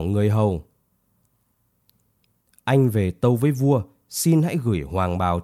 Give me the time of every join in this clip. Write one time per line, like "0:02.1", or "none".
none